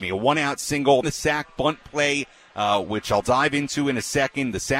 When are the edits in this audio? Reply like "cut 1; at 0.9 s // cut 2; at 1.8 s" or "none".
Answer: cut 1; at 1.0 s